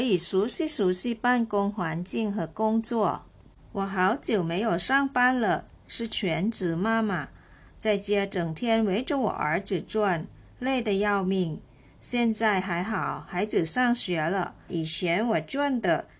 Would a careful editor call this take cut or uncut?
cut